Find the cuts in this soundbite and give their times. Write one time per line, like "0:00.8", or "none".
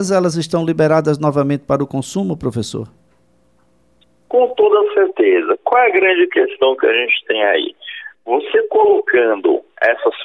none